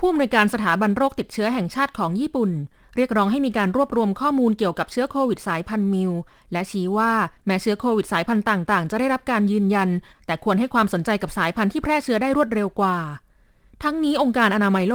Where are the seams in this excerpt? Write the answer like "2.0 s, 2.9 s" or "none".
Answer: none